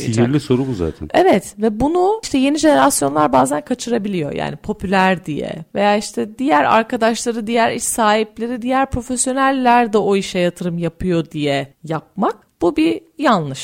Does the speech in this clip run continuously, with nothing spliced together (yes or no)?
yes